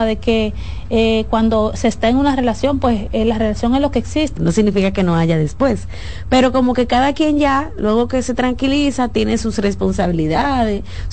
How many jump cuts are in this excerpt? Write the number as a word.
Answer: one